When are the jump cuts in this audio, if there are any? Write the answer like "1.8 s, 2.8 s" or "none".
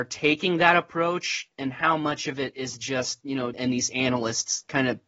3.5 s